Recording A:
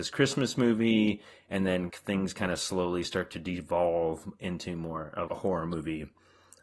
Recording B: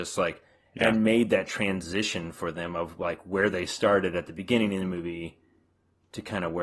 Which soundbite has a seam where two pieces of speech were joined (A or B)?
A